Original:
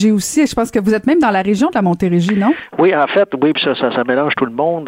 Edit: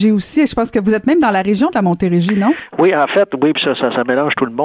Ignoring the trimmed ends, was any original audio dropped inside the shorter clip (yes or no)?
no